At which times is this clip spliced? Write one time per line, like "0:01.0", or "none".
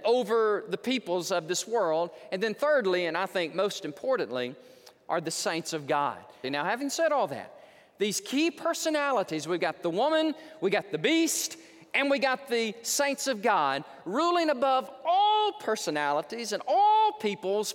0:06.4